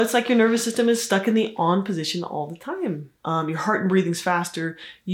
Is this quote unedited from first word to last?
no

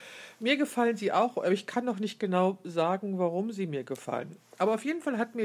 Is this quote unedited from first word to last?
yes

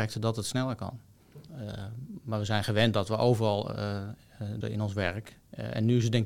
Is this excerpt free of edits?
no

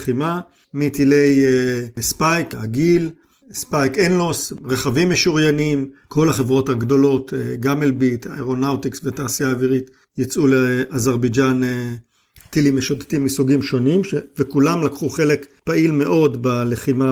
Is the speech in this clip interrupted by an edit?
yes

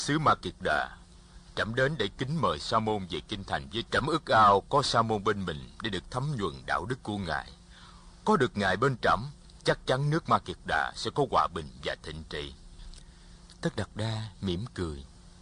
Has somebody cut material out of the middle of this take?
yes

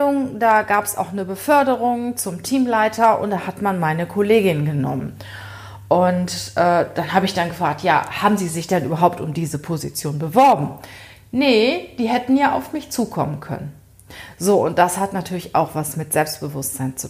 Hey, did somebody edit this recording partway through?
no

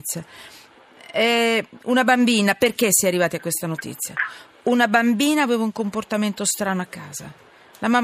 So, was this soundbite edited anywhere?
no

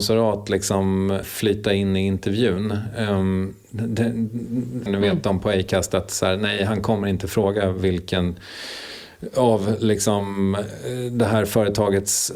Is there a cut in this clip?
yes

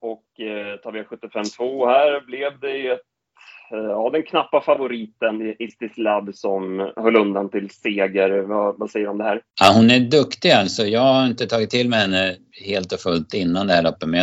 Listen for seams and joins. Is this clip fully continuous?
no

